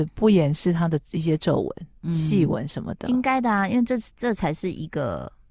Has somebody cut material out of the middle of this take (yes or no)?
no